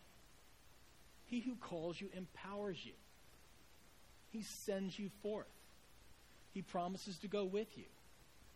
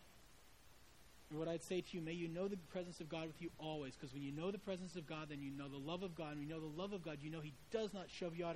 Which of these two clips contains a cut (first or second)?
second